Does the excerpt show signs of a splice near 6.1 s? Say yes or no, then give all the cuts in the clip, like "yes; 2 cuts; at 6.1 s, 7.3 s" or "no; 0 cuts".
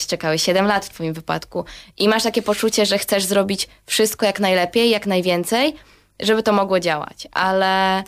no; 0 cuts